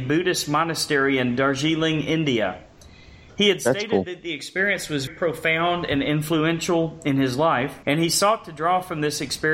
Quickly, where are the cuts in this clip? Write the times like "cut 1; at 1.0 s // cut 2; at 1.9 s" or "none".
cut 1; at 5.1 s // cut 2; at 7.8 s